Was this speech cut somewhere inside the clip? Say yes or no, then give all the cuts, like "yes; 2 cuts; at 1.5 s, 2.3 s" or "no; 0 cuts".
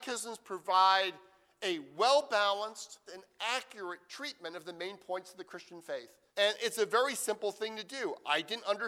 yes; 2 cuts; at 3.1 s, 6.3 s